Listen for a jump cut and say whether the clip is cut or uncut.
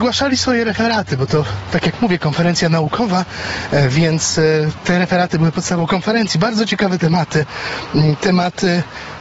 uncut